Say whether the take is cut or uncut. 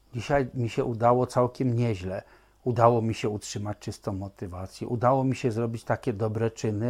uncut